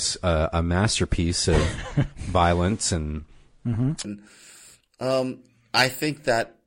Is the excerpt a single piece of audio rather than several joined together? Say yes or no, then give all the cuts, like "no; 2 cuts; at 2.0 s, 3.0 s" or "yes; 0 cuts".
no; 1 cut; at 4.0 s